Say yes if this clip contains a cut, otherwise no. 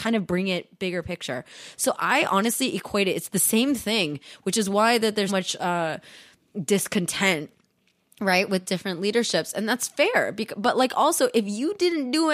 yes